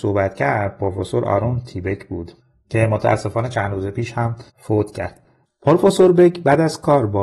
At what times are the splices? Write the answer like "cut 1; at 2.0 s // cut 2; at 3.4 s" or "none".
cut 1; at 4.5 s